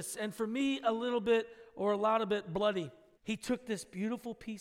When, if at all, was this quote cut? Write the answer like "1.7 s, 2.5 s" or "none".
3.2 s